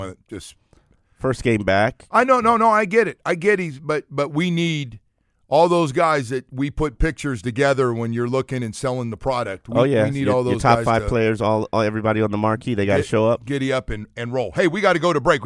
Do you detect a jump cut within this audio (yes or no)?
no